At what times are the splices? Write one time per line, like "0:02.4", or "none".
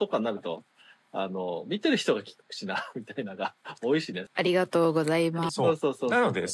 0:04.3
0:05.5